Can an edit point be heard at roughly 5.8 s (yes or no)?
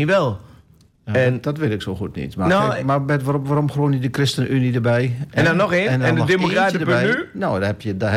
no